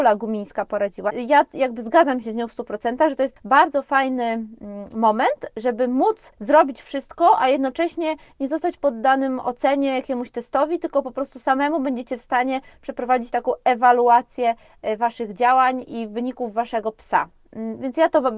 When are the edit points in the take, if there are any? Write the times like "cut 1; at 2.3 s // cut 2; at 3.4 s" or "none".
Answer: cut 1; at 1.1 s